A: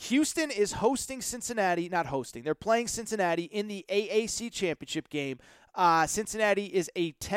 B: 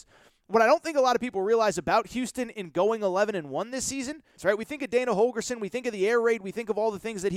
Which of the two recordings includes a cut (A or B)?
B